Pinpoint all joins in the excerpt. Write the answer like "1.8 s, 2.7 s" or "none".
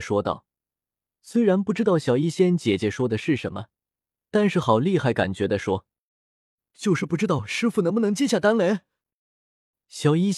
none